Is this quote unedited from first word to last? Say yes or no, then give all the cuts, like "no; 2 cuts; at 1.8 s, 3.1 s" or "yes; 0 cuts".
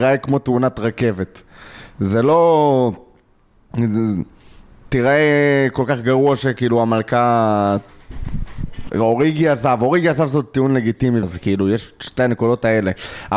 no; 2 cuts; at 8.9 s, 11.2 s